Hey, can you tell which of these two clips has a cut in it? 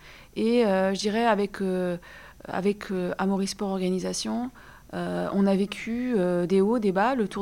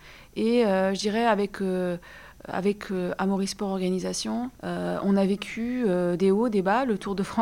second; 1 cut; at 4.6 s

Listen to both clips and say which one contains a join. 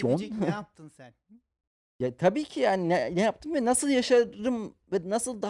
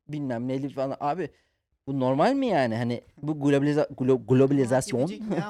second; 1 cut; at 3.1 s

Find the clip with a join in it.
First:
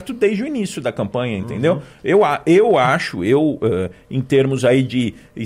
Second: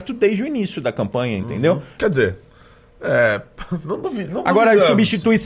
second; 1 cut; at 2.0 s

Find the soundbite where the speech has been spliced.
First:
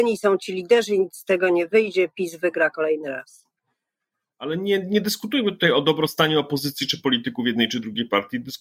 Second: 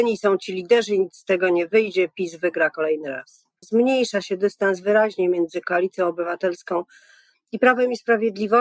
second; 1 cut; at 3.6 s

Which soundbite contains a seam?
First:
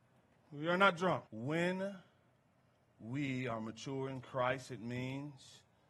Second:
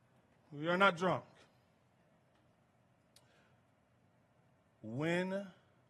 first; 1 cut; at 1.3 s

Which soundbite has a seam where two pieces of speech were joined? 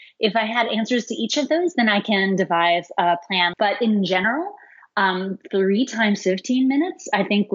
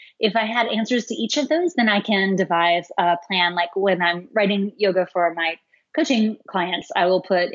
first; 1 cut; at 3.5 s

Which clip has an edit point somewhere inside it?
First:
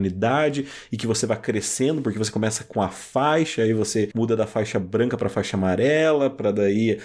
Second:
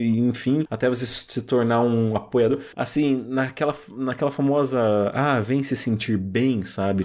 second; 1 cut; at 2.7 s

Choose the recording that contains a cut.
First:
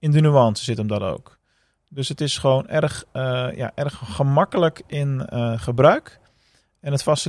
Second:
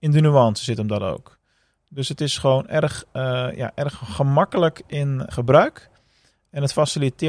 second; 1 cut; at 5.3 s

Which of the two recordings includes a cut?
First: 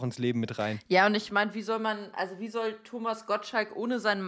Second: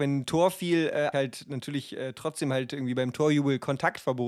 second; 1 cut; at 1.1 s

